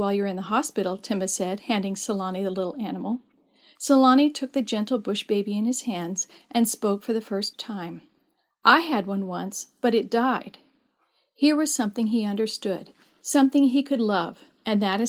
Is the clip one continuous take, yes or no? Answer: yes